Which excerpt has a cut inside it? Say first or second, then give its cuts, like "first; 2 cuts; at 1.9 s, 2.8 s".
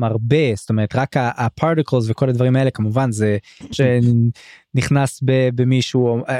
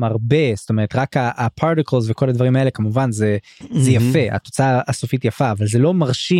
first; 1 cut; at 3.7 s